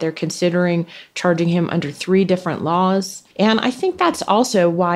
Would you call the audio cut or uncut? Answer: cut